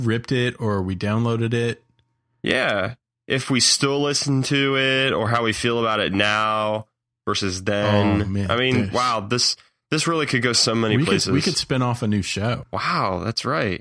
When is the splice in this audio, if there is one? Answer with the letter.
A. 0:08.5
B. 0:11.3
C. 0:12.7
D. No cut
D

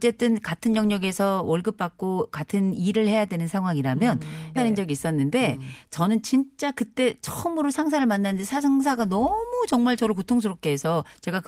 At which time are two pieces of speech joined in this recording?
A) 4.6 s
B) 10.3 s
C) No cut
A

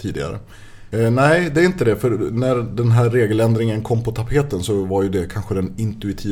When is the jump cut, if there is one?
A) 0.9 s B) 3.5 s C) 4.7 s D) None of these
A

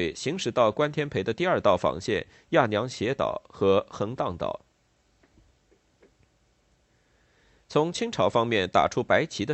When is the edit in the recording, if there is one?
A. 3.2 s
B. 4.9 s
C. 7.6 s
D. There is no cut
B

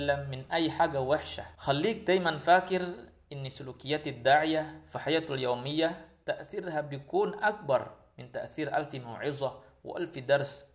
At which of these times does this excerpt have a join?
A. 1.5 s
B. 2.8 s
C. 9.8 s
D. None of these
A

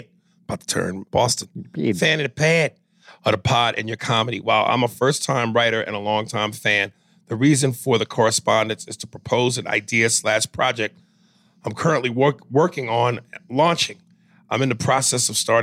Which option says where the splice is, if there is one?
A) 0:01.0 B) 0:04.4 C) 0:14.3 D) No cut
A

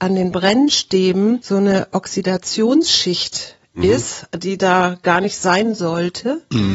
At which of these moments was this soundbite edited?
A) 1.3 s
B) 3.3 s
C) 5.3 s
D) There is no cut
D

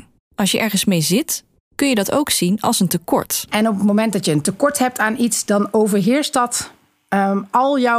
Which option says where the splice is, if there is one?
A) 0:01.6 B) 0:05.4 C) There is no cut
A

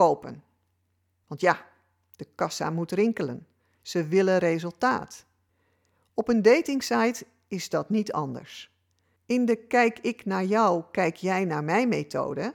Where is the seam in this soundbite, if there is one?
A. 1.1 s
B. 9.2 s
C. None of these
B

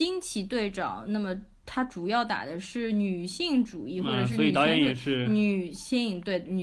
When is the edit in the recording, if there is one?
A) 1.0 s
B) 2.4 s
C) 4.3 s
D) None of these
D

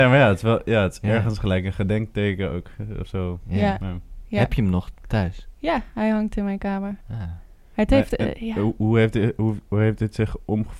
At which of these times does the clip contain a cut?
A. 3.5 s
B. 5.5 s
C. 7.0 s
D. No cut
C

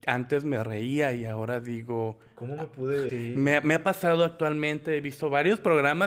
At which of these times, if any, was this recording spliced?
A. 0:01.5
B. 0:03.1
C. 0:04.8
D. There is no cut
B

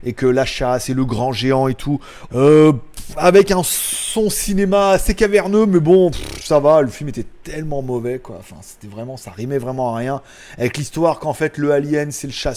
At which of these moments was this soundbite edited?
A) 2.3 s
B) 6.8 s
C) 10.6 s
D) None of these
A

